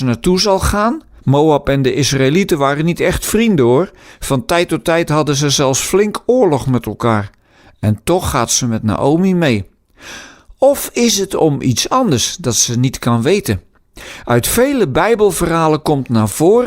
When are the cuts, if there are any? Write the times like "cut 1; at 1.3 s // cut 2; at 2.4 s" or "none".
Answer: cut 1; at 1.2 s